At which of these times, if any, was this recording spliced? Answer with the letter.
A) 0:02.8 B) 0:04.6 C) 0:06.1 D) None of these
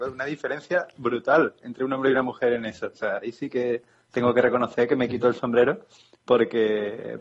D